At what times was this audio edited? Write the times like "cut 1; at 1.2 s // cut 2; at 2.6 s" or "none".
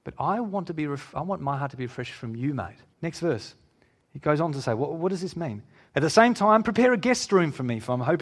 cut 1; at 2.9 s // cut 2; at 5.9 s

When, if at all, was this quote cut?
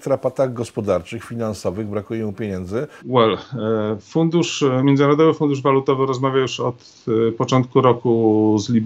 cut 1; at 3.0 s

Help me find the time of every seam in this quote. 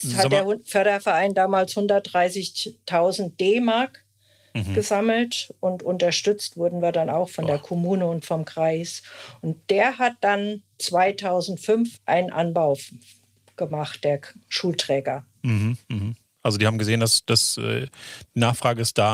cut 1; at 12.0 s

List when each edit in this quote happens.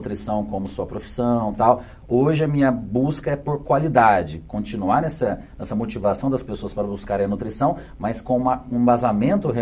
none

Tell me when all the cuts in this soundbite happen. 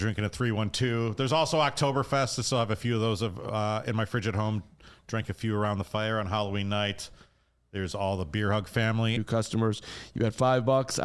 cut 1; at 9.2 s

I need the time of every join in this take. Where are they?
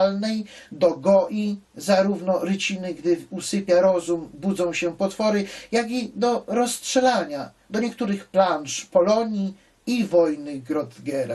none

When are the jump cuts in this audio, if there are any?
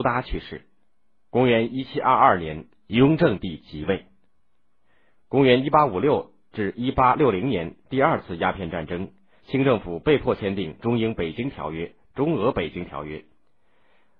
cut 1; at 5.2 s // cut 2; at 12.1 s

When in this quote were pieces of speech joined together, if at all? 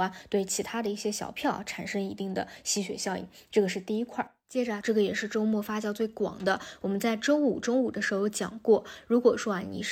cut 1; at 4.8 s

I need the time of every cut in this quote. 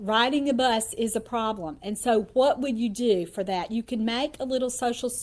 none

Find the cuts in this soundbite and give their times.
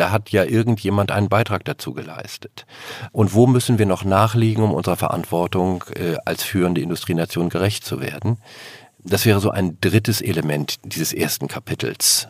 cut 1; at 3.1 s

